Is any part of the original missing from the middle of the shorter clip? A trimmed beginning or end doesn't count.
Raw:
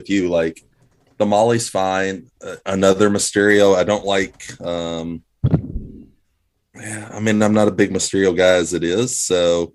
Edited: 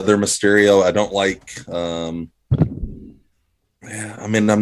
no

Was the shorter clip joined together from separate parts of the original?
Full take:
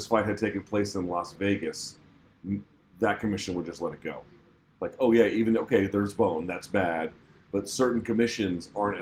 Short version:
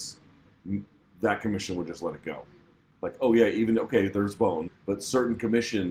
yes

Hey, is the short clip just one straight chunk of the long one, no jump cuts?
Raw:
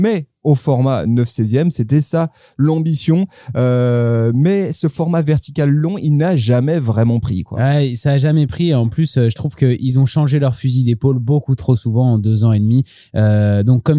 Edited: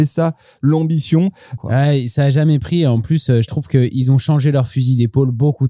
no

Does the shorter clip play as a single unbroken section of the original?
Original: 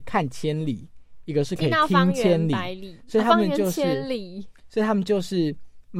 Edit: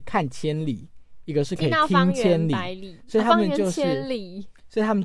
yes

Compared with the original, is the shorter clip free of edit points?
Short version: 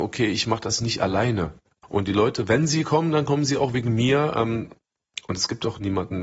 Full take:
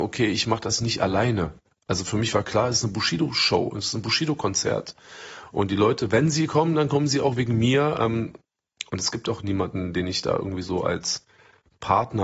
no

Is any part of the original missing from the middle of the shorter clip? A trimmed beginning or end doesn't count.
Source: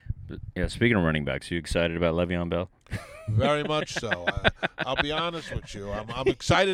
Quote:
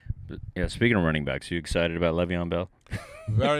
no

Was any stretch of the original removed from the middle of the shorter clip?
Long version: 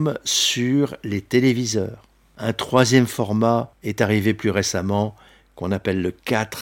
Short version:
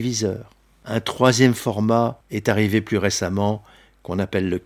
no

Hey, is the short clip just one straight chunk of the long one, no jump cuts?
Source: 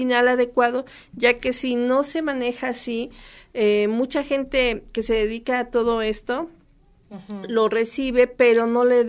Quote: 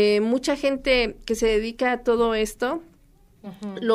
yes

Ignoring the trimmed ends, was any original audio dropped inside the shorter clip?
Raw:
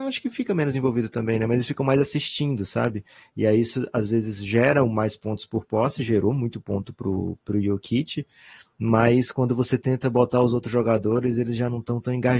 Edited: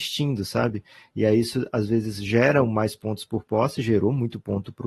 no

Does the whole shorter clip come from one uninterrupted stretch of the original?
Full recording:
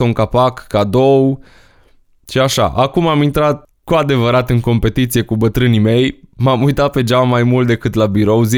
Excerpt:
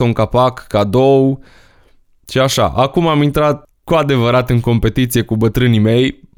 yes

